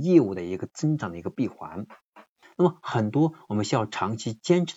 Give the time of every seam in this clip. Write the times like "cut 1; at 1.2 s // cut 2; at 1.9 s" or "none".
cut 1; at 2.4 s